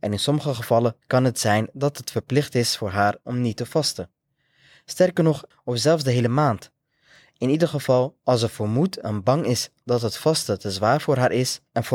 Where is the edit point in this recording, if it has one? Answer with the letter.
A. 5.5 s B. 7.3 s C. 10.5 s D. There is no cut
A